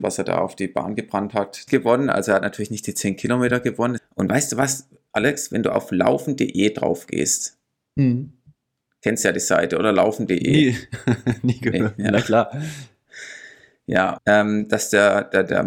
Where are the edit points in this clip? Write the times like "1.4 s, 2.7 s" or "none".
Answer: 1.7 s, 4.0 s, 14.2 s